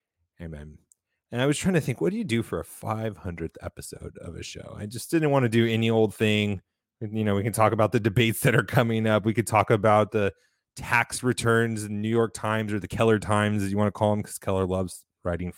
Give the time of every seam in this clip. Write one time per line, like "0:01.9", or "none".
none